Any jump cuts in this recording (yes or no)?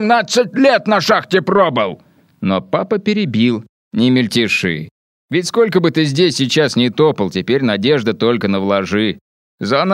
no